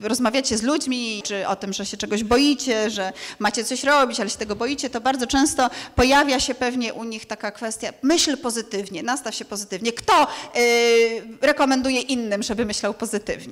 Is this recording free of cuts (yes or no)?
no